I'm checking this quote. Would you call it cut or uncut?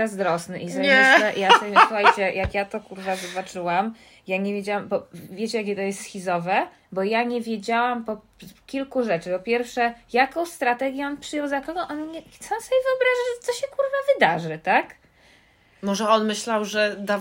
uncut